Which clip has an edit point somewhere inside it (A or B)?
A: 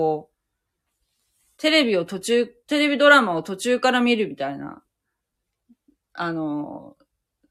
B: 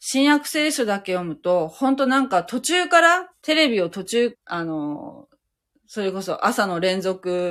B